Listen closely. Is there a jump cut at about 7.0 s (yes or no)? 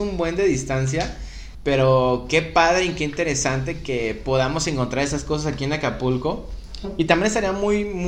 no